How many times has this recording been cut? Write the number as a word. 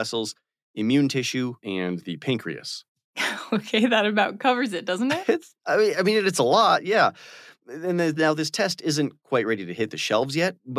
one